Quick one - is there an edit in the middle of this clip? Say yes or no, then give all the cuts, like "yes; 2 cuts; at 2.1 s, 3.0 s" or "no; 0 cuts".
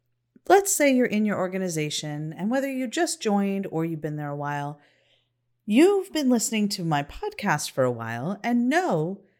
no; 0 cuts